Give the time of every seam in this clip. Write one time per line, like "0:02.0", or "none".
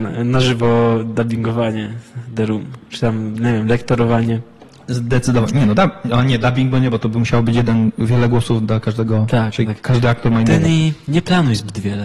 none